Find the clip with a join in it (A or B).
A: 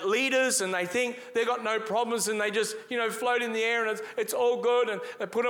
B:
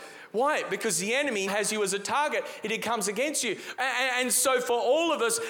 B